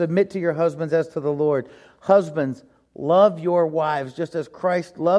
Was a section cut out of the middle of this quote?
no; 0 cuts

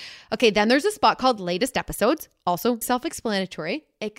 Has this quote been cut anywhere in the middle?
yes; 1 cut; at 2.8 s

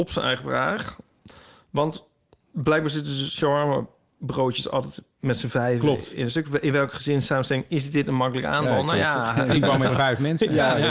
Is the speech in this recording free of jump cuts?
yes; 0 cuts

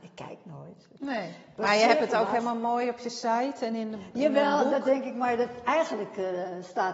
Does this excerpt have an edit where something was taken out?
no; 0 cuts

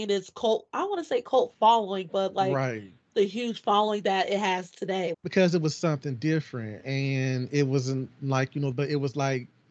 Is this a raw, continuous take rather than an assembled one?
no; 2 cuts; at 5.1 s, 8.7 s

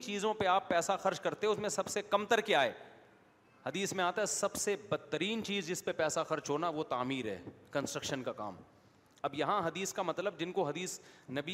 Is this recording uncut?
yes; 0 cuts

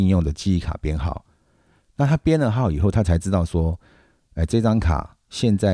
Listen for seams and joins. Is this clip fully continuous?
yes; 0 cuts

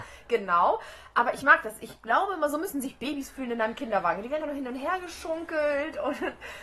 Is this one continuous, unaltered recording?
no; 1 cut; at 4.4 s

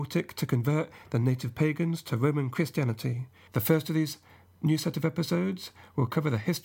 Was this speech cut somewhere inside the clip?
yes; 1 cut; at 3.5 s

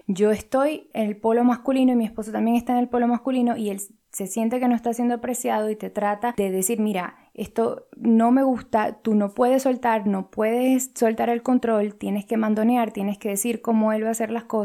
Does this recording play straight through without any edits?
yes; 0 cuts

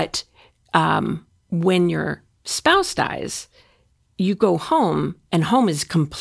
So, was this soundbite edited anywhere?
no; 0 cuts

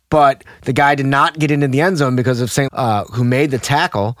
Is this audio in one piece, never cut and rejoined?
no; 1 cut; at 2.7 s

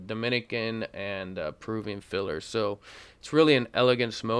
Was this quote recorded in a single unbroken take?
yes; 0 cuts

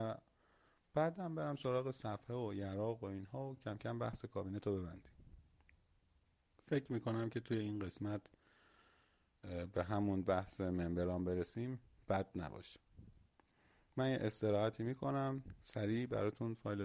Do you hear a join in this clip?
no; 0 cuts

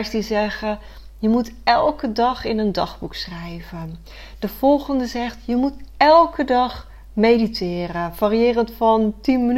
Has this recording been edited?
no; 0 cuts

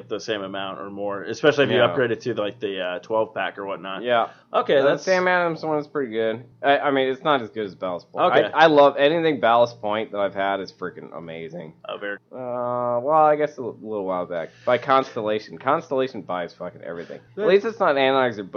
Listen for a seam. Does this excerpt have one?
yes; 1 cut; at 12.2 s

